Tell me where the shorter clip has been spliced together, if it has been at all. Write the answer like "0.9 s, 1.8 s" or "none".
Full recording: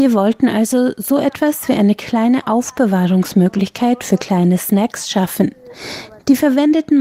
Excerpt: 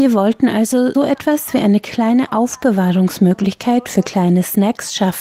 0.9 s